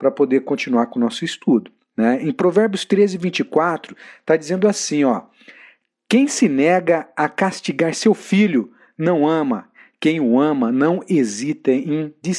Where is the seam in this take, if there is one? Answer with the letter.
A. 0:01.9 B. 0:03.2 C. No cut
C